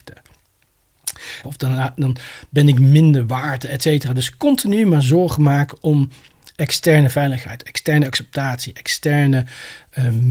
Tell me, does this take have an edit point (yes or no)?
yes